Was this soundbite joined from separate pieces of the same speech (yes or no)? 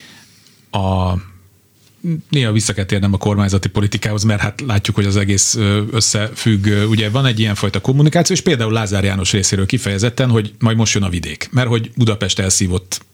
no